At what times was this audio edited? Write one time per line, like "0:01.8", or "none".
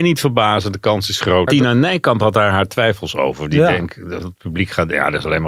0:01.5